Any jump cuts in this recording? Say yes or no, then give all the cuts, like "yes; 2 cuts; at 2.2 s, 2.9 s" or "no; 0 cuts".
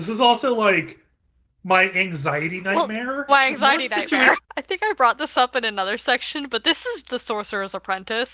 yes; 3 cuts; at 3.3 s, 4.4 s, 7.0 s